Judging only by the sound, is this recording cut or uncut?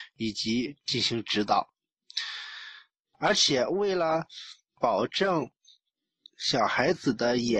cut